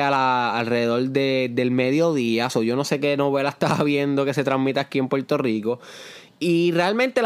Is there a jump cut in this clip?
no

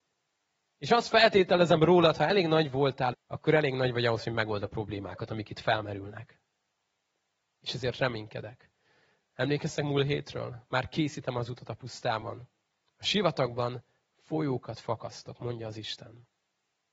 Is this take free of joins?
no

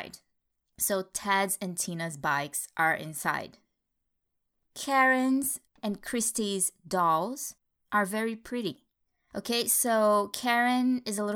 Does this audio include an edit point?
no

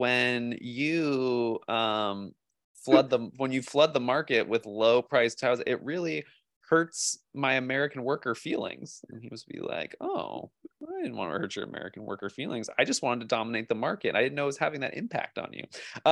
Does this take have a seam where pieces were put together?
no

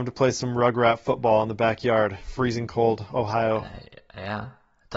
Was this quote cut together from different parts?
no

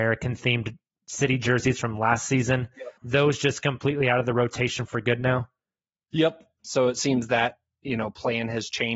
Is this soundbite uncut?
no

